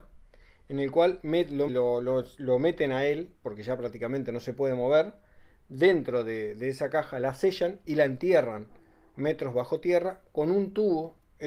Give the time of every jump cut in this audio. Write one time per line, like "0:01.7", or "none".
0:01.7